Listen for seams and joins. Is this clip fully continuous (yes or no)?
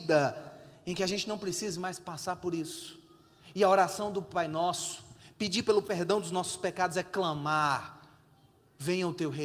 yes